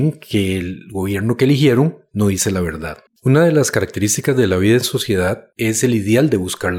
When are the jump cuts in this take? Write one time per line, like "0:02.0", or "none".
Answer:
0:03.1